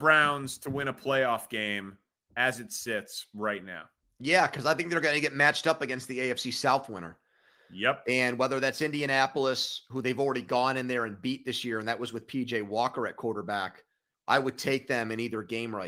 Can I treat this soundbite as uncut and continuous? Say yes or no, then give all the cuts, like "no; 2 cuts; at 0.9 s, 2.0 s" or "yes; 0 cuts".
no; 1 cut; at 14.1 s